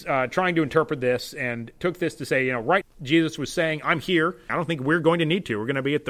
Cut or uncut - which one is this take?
cut